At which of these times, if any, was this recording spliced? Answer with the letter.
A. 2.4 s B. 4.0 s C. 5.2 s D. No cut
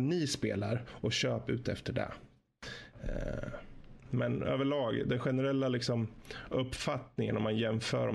B